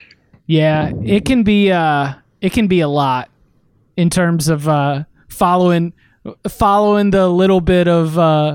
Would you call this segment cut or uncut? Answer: uncut